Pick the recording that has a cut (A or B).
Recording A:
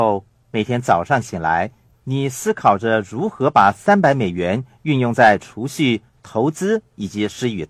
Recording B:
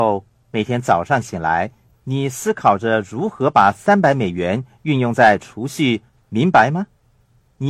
B